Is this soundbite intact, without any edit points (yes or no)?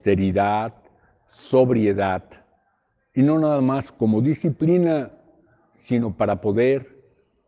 yes